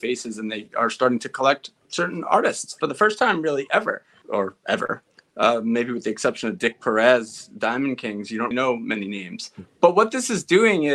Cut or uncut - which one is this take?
cut